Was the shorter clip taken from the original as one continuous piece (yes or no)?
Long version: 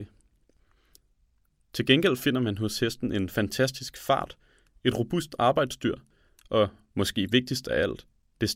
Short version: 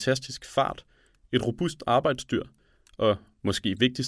yes